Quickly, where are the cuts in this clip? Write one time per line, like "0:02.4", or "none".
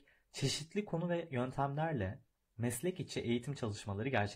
none